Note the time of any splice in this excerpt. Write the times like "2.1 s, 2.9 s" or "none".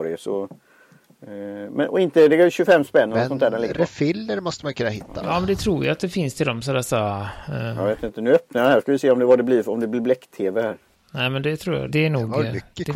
11.9 s